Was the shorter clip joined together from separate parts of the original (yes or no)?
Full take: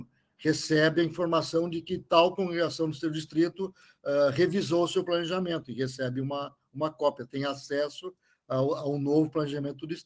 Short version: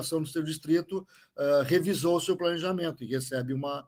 no